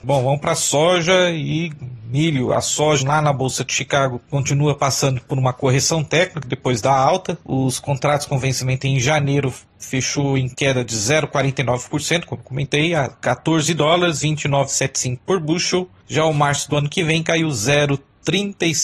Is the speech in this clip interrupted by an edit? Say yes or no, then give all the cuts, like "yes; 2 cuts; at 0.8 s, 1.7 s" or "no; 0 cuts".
yes; 1 cut; at 3.0 s